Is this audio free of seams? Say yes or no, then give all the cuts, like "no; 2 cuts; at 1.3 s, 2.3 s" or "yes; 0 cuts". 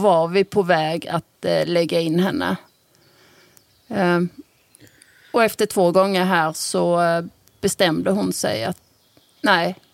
yes; 0 cuts